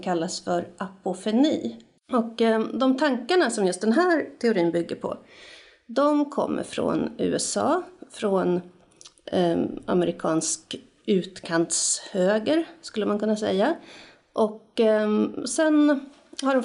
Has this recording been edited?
yes; 1 cut; at 2.0 s

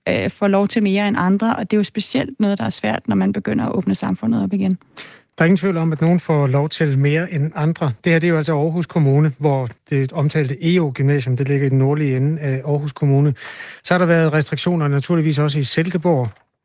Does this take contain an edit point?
no; 0 cuts

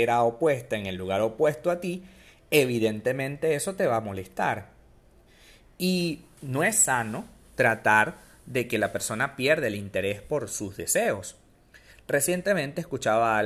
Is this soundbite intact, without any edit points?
yes; 0 cuts

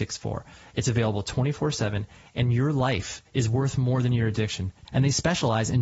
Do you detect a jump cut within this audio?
yes; 1 cut; at 4.8 s

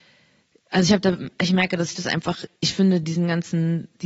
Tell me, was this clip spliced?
no; 0 cuts

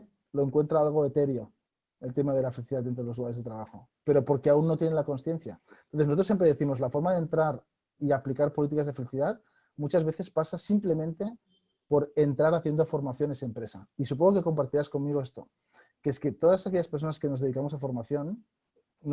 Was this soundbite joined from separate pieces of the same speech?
no; 0 cuts

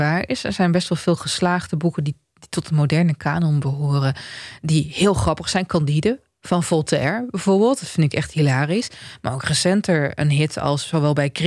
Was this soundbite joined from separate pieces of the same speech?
no; 0 cuts

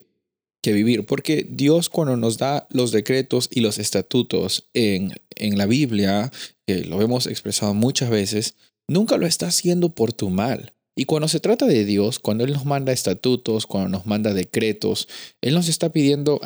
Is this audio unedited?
no; 2 cuts; at 1.1 s, 10.9 s

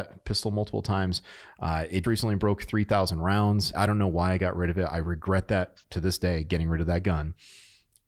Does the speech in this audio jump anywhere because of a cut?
yes; 2 cuts; at 2.0 s, 3.7 s

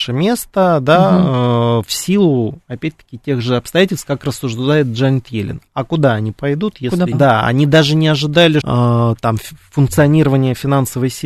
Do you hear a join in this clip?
yes; 2 cuts; at 7.1 s, 8.6 s

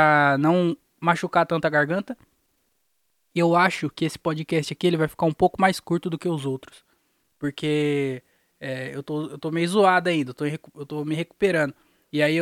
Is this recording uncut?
yes; 0 cuts

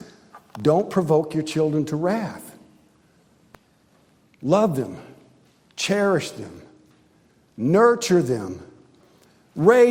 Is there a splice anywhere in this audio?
no; 0 cuts

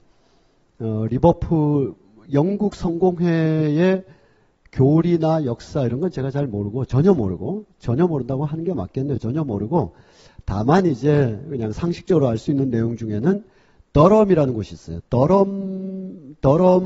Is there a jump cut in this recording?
no; 0 cuts

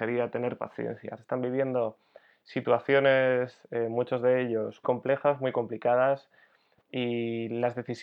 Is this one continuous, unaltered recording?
no; 2 cuts; at 1.2 s, 4.8 s

